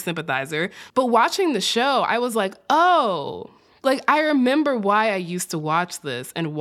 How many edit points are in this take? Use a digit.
0